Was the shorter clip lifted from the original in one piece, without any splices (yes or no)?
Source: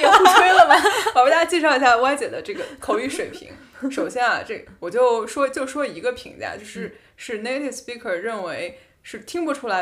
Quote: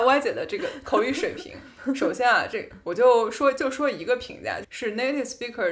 no